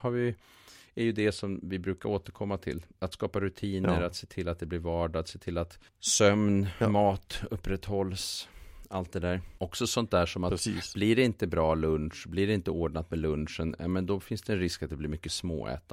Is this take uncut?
no; 2 cuts; at 5.9 s, 9.6 s

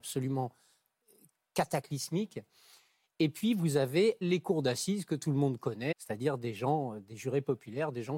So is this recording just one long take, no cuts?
no; 2 cuts; at 4.2 s, 5.9 s

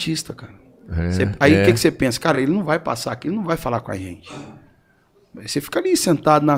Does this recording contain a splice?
no; 0 cuts

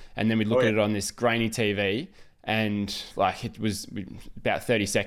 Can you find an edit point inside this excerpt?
no; 0 cuts

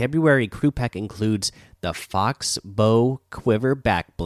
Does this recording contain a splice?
no; 0 cuts

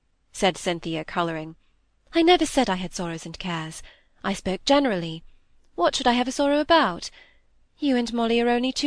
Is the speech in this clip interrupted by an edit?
no; 0 cuts

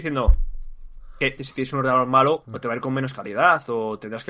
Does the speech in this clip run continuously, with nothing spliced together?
no; 2 cuts; at 1.4 s, 2.4 s

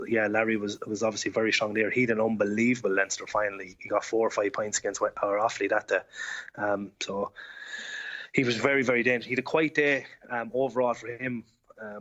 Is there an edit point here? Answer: no; 0 cuts

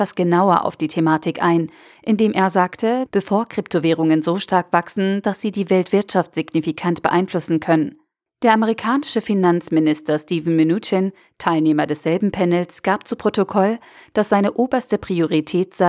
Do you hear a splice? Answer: yes; 2 cuts; at 3.1 s, 8.3 s

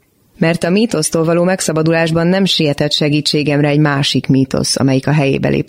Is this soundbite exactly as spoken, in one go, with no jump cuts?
yes; 0 cuts

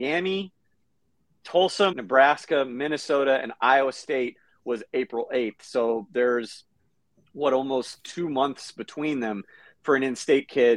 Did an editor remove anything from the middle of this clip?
yes; 1 cut; at 1.9 s

